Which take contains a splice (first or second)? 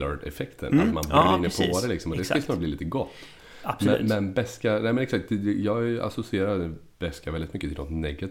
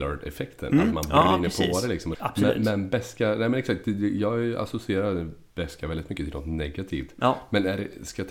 second